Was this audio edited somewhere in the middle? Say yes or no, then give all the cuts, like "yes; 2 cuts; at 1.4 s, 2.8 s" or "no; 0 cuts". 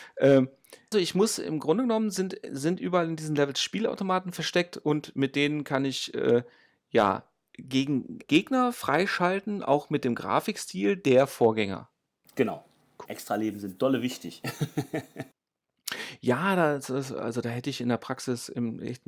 yes; 3 cuts; at 0.9 s, 8.2 s, 13.1 s